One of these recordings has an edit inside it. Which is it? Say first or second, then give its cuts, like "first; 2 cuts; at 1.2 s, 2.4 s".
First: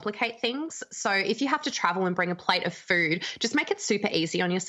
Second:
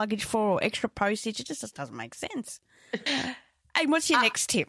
second; 1 cut; at 3.1 s